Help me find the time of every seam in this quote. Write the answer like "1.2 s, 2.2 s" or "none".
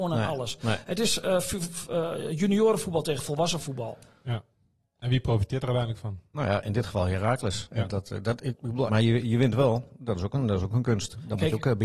8.9 s